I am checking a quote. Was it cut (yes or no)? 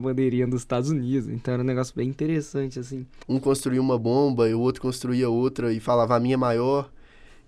yes